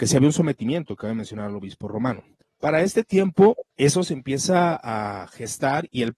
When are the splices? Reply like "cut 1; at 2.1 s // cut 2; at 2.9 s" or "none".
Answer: cut 1; at 2.4 s // cut 2; at 3.7 s